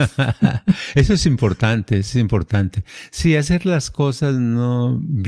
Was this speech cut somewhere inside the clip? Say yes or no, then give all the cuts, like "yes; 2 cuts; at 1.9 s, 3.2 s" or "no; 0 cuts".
no; 0 cuts